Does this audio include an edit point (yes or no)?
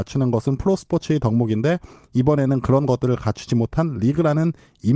no